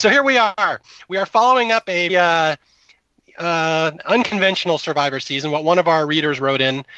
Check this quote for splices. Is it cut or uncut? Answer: cut